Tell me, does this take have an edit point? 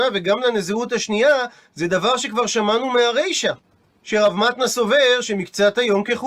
no; 0 cuts

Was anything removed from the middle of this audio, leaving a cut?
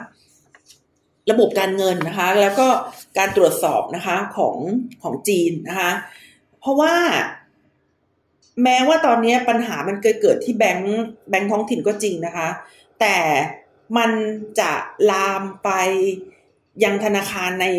no; 0 cuts

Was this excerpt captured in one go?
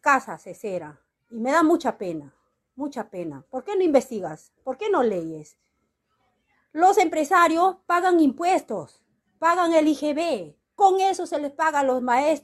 yes; 0 cuts

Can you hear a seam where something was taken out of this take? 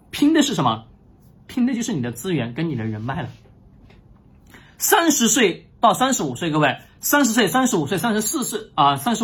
no; 0 cuts

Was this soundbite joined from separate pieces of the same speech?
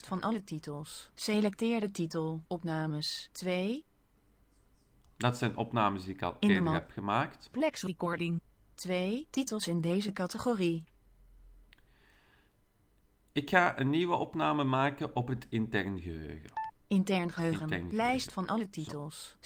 no; 0 cuts

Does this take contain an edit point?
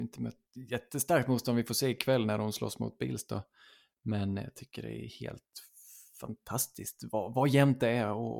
no; 0 cuts

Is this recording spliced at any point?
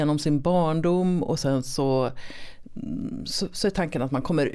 no; 0 cuts

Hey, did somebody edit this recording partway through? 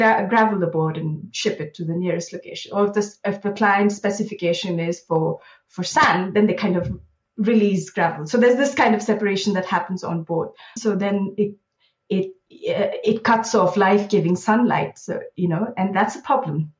yes; 1 cut; at 10.8 s

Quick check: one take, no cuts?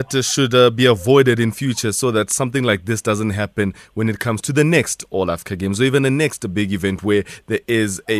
yes; 0 cuts

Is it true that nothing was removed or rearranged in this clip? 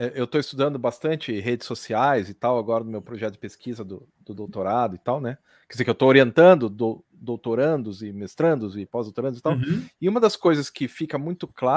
yes; 0 cuts

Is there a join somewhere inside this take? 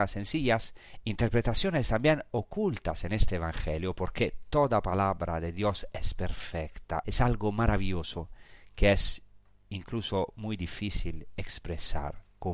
yes; 2 cuts; at 1.0 s, 7.0 s

